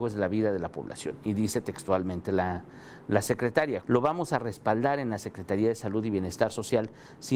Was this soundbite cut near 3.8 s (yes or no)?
yes